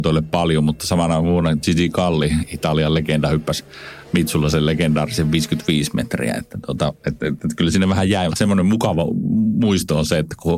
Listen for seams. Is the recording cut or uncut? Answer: cut